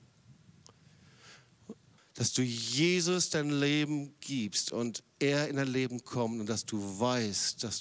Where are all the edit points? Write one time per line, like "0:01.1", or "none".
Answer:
0:02.0